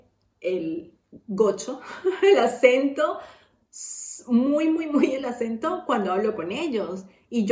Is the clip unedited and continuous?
yes; 0 cuts

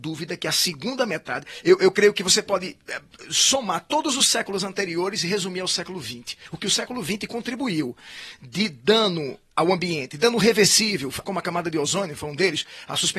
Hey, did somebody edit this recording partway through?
yes; 2 cuts; at 1.6 s, 11.2 s

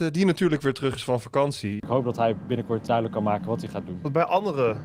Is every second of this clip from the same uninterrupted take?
no; 2 cuts; at 1.8 s, 2.9 s

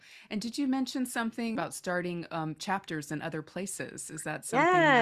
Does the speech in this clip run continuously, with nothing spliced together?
no; 1 cut; at 1.6 s

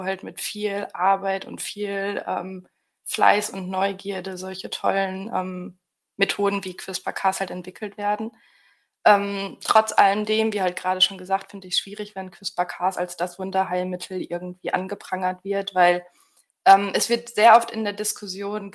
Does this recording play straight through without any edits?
yes; 0 cuts

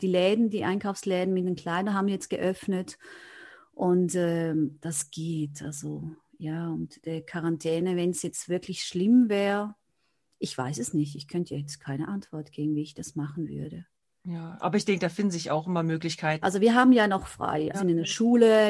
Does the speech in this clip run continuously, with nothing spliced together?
no; 2 cuts; at 16.4 s, 17.7 s

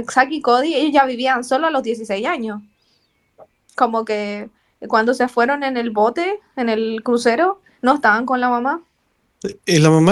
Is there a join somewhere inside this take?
no; 0 cuts

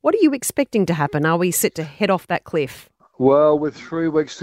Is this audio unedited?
yes; 0 cuts

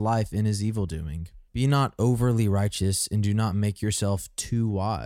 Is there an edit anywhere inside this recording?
yes; 1 cut; at 1.5 s

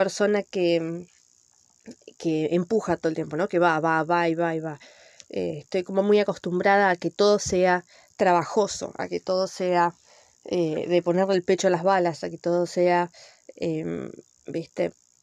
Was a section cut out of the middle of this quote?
no; 0 cuts

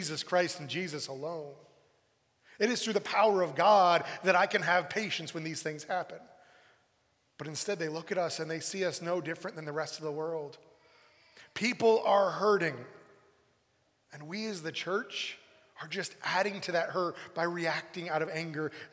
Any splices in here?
no; 0 cuts

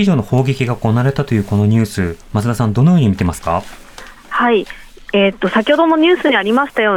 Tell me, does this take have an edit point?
no; 0 cuts

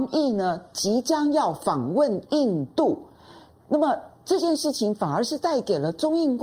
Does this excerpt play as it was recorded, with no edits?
yes; 0 cuts

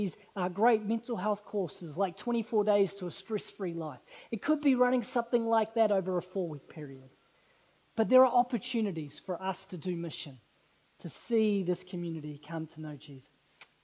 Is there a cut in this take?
no; 0 cuts

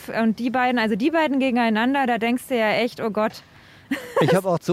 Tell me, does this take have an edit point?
no; 0 cuts

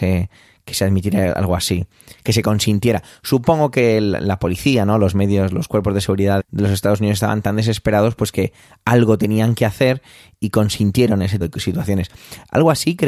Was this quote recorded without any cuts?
no; 2 cuts; at 6.4 s, 11.4 s

